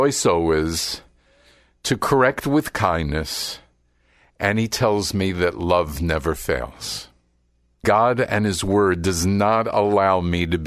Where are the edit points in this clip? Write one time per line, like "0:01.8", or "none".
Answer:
0:07.8